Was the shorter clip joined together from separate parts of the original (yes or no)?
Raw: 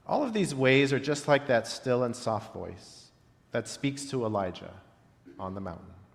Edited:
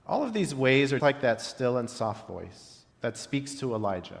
yes